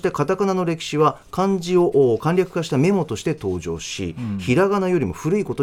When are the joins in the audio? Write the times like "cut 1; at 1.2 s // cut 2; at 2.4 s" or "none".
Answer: none